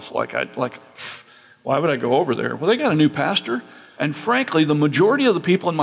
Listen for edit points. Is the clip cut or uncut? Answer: cut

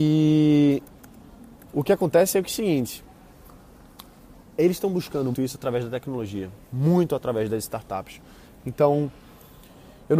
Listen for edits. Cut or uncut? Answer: cut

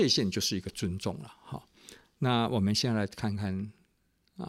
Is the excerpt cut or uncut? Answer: uncut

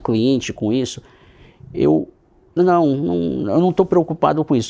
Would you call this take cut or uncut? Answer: cut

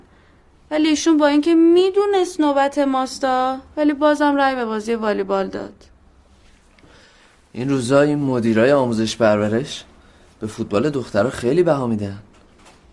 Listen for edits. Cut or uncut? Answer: uncut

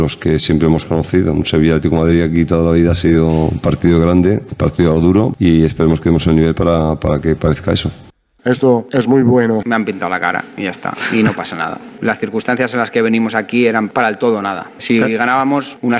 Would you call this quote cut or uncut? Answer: cut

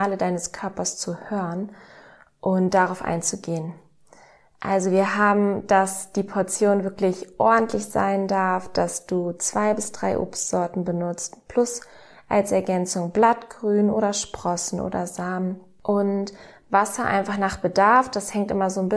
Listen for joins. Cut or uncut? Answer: uncut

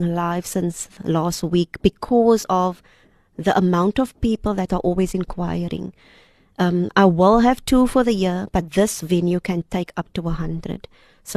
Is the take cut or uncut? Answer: uncut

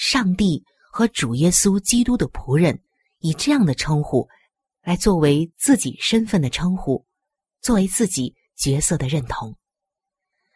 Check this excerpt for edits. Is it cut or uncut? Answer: uncut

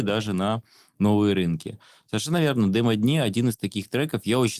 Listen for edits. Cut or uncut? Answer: uncut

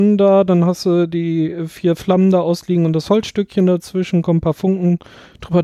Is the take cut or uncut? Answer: uncut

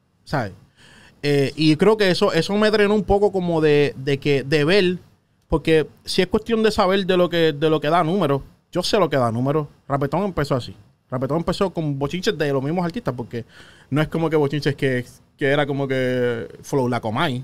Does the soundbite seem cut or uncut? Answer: uncut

